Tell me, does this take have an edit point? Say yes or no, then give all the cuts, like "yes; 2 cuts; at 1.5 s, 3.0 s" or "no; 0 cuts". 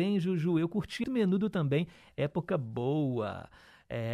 yes; 1 cut; at 1.0 s